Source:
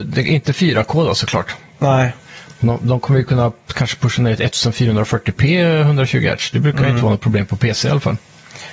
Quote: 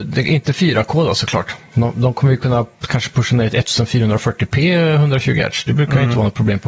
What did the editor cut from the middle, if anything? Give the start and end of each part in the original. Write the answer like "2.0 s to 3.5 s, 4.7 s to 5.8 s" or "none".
1.7 s to 2.6 s